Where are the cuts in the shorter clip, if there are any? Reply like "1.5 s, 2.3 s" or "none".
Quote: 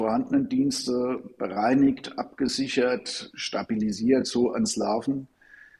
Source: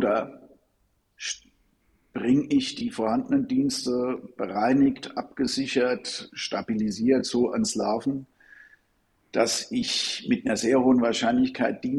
none